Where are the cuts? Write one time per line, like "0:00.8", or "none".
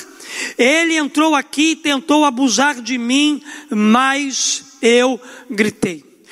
none